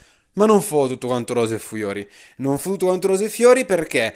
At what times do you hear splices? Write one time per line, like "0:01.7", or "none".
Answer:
none